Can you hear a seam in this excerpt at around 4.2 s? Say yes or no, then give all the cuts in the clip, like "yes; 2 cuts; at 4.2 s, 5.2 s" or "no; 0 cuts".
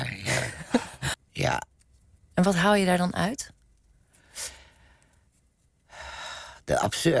no; 1 cut; at 1.1 s